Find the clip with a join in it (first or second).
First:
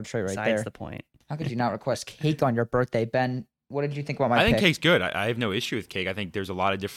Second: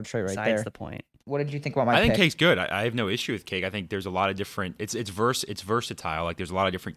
second